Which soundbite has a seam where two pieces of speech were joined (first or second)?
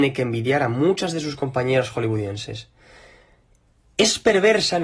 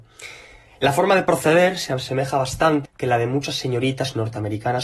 second